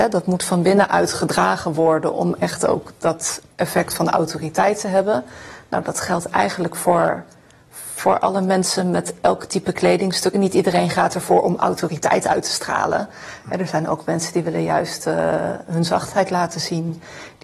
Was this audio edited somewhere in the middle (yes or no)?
no